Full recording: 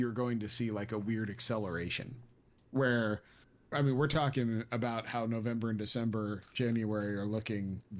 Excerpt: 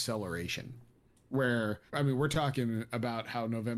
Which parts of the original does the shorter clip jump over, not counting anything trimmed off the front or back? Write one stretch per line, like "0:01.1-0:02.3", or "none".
0:03.3-0:03.7

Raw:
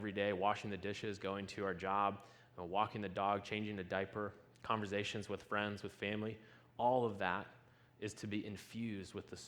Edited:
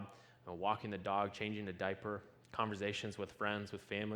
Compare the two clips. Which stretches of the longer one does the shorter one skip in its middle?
none

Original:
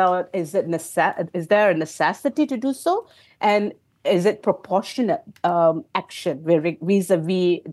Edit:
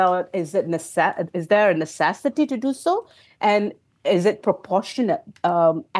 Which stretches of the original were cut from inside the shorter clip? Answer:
none

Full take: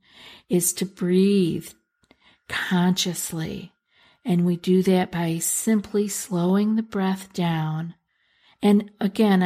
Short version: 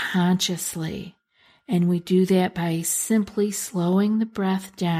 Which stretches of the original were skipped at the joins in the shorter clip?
none

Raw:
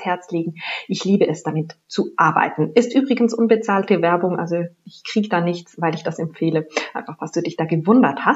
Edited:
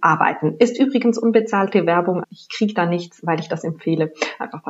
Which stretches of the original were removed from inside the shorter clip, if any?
0:04.4-0:04.8

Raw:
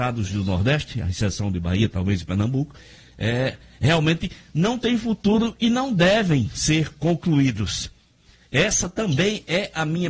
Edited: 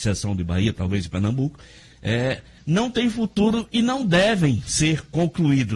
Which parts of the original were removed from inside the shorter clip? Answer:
0:03.7-0:04.5

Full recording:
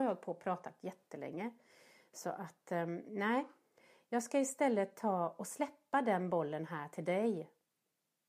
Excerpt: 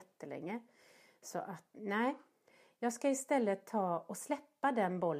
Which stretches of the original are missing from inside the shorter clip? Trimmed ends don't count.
0:02.7-0:03.0

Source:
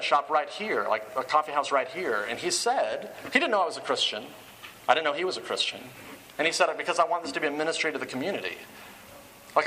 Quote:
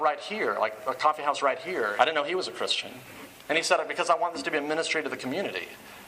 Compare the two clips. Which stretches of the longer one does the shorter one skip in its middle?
0:02.3-0:04.9

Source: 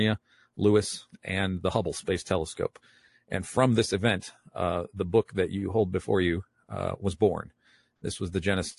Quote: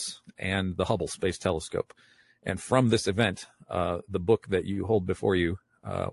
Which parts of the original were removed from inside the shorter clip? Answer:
none

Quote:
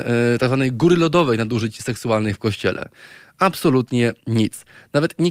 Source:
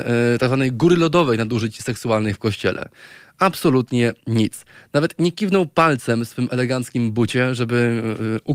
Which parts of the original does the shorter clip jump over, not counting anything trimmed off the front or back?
none

